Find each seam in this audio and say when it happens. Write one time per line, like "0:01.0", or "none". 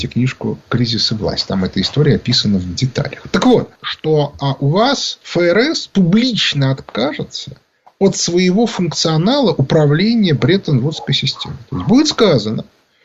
0:03.8
0:05.2

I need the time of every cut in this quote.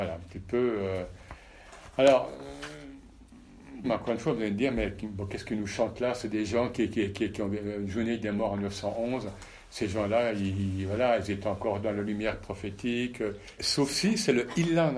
0:03.8
0:13.6

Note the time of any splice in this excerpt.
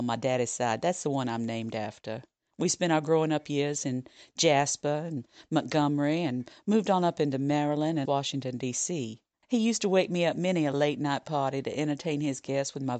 0:08.0
0:09.4

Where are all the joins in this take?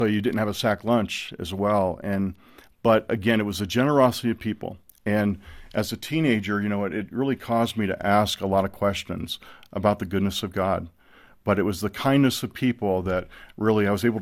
none

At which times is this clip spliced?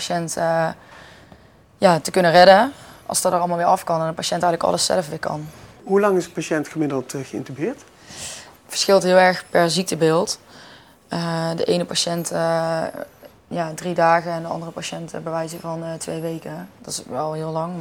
none

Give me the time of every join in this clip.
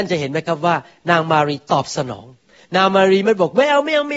none

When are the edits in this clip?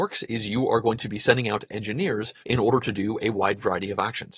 0:02.4

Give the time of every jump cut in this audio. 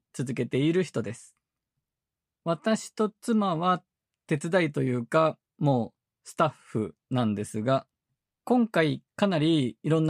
none

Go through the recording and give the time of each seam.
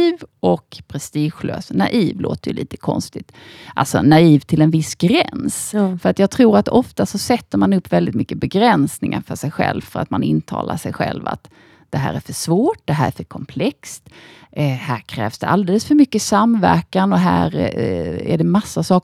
none

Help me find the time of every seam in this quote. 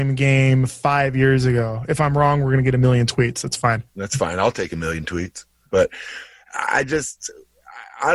0:03.9
0:05.7

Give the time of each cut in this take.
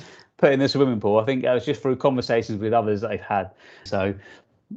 0:03.9

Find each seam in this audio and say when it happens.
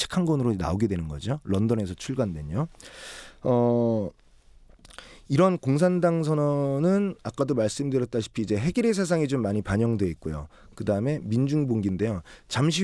none

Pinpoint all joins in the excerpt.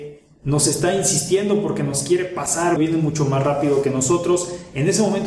0:02.8

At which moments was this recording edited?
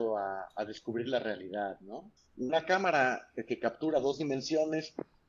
0:02.2

